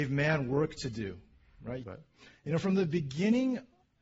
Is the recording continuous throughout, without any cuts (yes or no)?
no